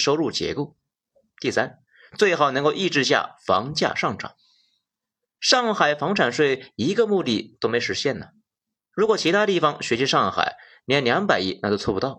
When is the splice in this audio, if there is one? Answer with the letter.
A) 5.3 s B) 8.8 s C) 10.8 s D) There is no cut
D